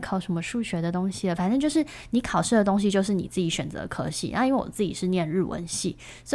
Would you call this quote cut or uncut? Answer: uncut